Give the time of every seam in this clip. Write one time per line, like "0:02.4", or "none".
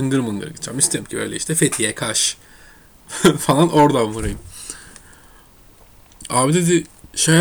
0:06.3